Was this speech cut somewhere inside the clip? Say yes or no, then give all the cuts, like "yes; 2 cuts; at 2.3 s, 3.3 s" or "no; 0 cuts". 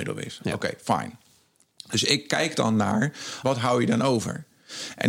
yes; 1 cut; at 3.4 s